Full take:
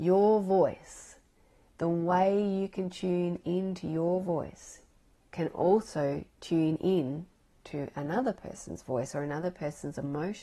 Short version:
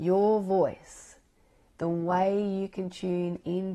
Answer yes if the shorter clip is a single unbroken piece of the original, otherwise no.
yes